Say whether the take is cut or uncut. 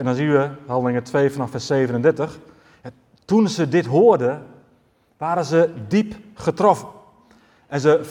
uncut